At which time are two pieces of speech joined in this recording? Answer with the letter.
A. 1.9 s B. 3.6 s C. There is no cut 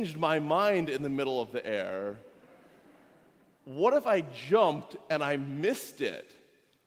B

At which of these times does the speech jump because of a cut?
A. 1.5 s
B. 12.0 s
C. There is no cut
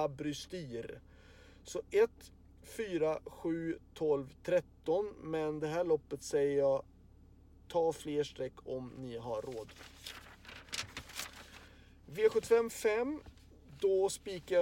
C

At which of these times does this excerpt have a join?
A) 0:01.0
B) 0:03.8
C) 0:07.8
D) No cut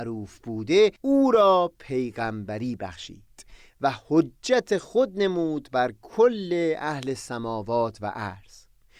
A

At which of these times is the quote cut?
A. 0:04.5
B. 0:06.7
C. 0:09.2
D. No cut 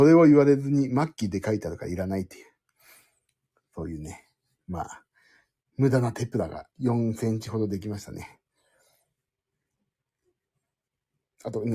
B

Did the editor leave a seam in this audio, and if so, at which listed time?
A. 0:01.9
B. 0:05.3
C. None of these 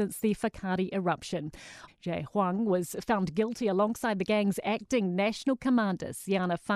A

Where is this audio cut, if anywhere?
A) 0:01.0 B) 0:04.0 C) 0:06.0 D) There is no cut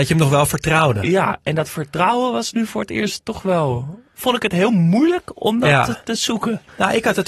C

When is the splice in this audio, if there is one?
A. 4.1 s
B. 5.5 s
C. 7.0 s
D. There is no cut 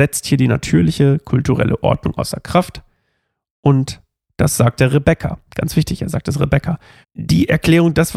C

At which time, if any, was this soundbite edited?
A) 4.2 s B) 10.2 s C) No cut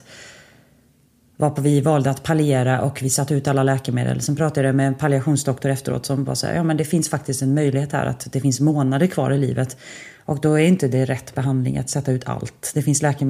C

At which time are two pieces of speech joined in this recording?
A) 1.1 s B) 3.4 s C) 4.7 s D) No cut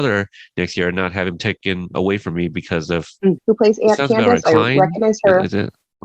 B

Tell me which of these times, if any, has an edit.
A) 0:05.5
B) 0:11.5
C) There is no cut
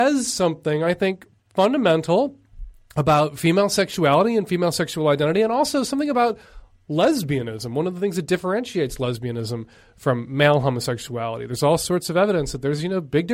C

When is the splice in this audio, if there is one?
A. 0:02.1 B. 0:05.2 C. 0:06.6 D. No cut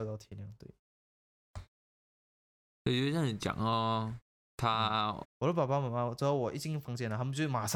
B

